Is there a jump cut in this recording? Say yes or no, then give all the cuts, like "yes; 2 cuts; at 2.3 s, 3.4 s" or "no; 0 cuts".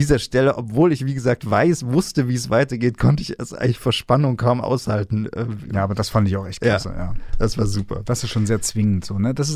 no; 0 cuts